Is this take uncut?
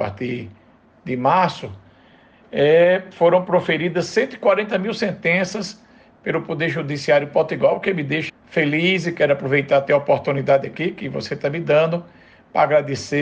no; 1 cut; at 8.3 s

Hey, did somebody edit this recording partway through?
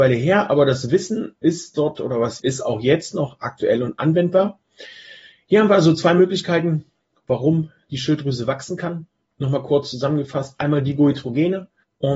yes; 1 cut; at 2.4 s

